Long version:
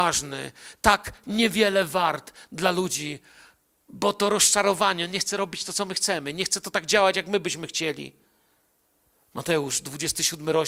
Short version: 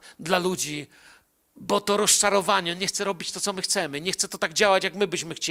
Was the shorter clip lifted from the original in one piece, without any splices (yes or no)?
yes